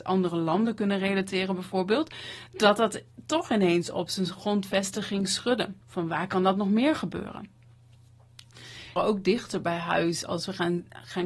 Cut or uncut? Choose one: cut